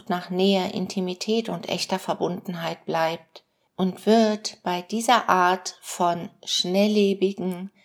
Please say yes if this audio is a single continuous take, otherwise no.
no